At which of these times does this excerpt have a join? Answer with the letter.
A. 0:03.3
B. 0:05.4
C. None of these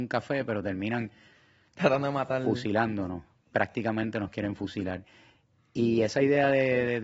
C